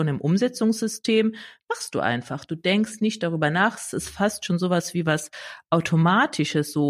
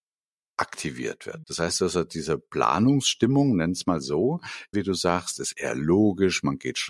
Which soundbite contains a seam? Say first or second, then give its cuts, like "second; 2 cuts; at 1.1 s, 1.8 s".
second; 2 cuts; at 1.4 s, 4.7 s